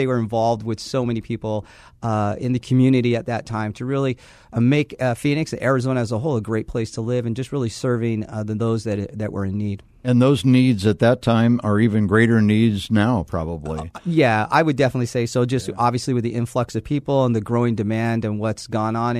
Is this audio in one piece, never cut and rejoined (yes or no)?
yes